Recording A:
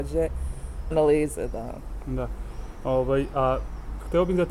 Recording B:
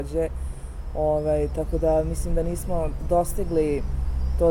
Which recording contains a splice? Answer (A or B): A